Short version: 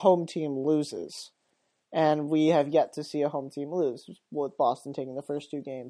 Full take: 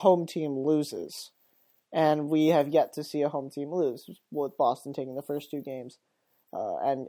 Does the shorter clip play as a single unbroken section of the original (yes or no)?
yes